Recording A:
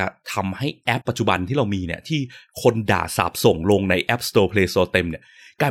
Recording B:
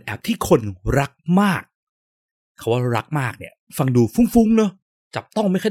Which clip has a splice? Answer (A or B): A